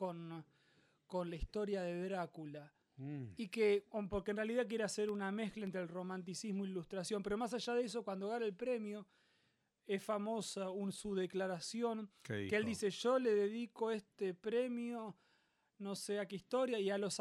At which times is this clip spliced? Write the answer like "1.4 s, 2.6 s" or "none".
none